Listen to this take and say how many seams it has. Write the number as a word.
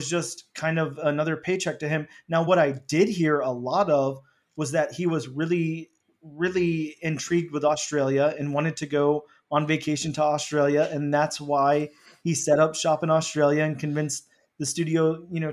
zero